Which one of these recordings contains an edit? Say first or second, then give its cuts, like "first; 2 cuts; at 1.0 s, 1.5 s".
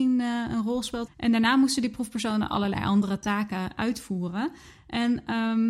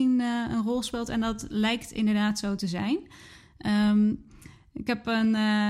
first; 1 cut; at 1.1 s